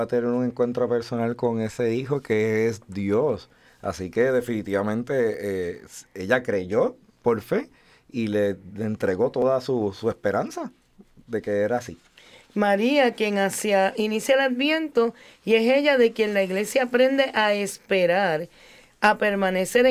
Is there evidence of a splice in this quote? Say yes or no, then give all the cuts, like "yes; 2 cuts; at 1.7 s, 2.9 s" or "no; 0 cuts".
no; 0 cuts